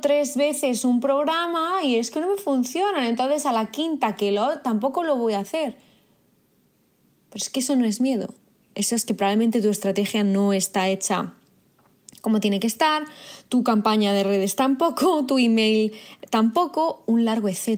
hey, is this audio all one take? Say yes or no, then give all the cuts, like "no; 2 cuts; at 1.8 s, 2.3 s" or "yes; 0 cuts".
yes; 0 cuts